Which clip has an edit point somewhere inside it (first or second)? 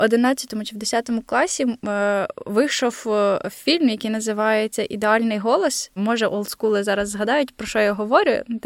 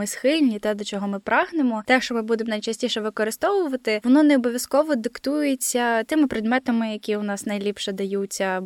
first